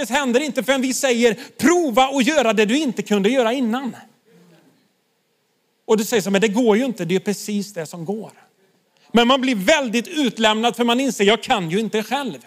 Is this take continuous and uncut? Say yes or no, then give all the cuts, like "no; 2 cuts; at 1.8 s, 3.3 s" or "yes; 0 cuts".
yes; 0 cuts